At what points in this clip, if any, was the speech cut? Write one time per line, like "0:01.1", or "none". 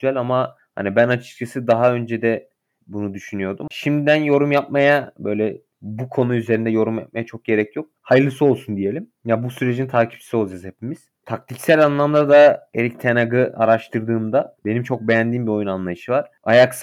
0:03.7